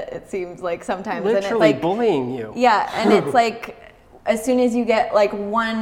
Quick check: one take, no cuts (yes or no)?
yes